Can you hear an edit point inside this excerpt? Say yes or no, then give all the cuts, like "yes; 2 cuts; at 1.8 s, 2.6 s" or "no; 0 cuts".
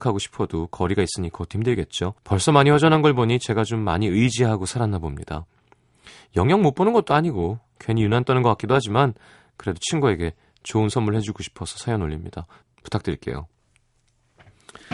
yes; 2 cuts; at 2.2 s, 12.6 s